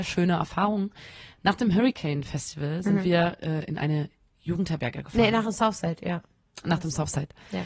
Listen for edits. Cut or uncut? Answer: uncut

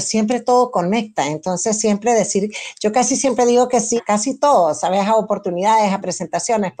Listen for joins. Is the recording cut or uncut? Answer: cut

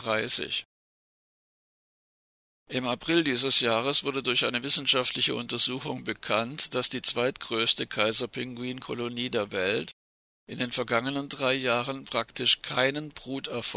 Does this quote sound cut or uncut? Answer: uncut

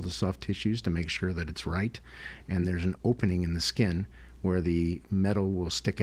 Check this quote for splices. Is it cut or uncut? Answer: cut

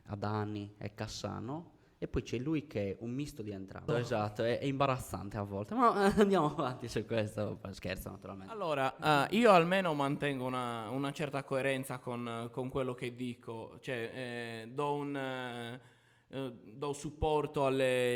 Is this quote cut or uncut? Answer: cut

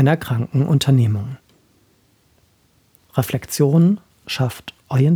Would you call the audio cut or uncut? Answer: uncut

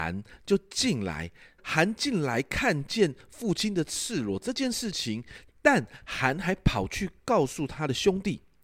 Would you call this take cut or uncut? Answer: cut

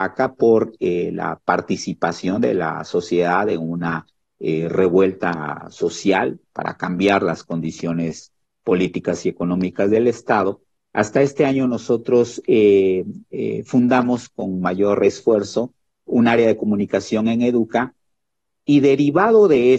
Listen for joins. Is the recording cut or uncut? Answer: uncut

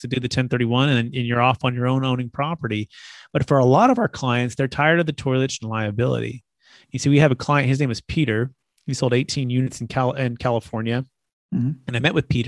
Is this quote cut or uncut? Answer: cut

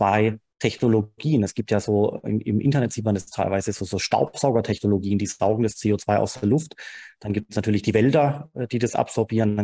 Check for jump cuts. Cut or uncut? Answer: uncut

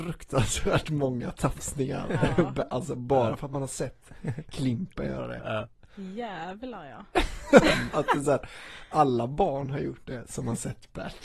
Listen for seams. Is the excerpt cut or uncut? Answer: uncut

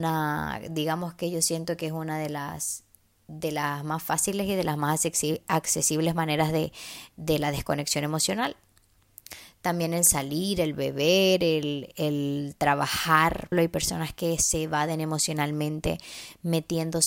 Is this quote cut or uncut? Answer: cut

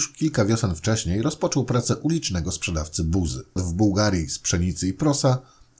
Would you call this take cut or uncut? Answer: cut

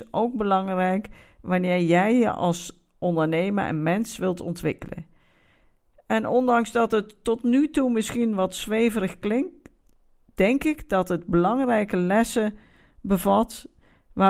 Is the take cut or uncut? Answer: uncut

